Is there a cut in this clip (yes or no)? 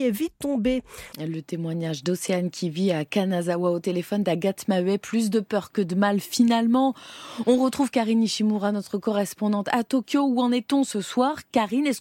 yes